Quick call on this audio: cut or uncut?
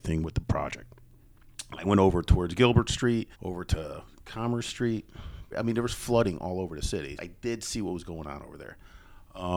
cut